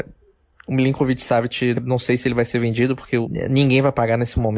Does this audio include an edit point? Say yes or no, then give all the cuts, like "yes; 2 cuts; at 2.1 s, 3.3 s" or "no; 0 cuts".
yes; 2 cuts; at 1.7 s, 3.2 s